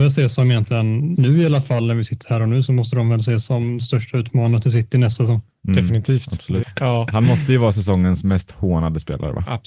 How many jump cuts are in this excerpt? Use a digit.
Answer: 2